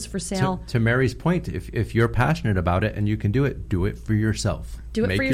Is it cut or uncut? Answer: uncut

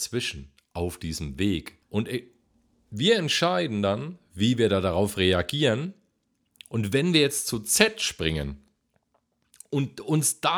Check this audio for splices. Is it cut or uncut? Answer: cut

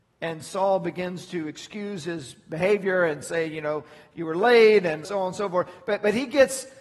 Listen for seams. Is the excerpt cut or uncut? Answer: cut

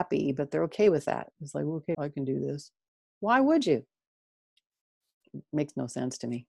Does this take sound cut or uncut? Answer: cut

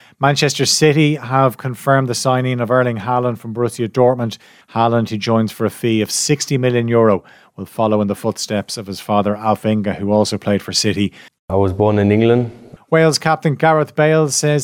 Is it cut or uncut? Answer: cut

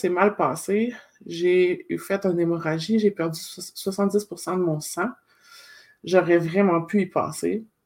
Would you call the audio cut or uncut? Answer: uncut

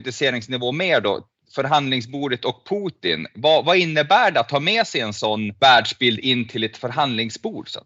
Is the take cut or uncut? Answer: uncut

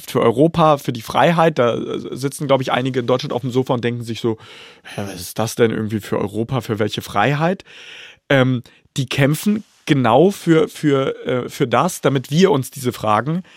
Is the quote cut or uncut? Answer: uncut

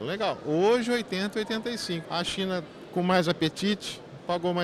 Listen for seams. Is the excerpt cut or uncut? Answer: cut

